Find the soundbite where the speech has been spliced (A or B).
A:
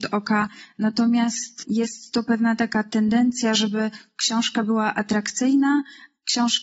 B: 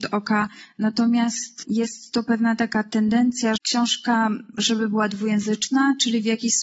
B